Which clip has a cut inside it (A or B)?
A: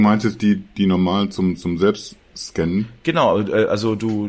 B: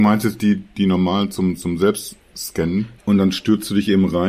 B